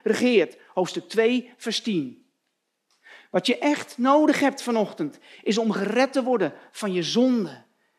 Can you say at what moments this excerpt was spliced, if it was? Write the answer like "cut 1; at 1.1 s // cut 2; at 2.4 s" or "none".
none